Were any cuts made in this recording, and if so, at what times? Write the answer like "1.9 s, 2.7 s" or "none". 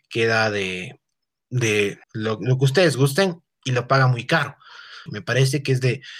2.0 s, 5.1 s